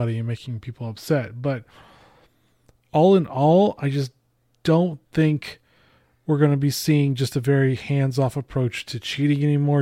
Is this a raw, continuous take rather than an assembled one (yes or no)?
yes